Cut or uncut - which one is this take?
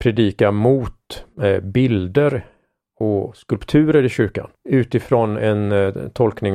cut